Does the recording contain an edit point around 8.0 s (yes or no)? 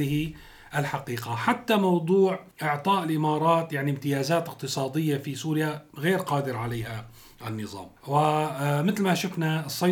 yes